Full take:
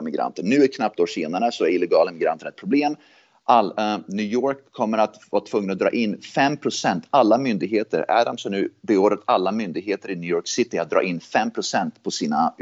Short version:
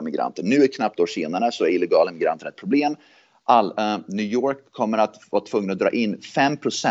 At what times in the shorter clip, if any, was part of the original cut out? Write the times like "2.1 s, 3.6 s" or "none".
none